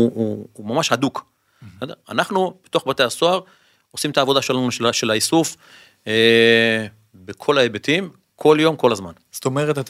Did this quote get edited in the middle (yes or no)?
no